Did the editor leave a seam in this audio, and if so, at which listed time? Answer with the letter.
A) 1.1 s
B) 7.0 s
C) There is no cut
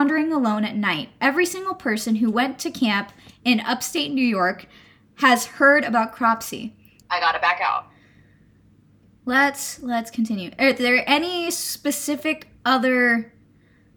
B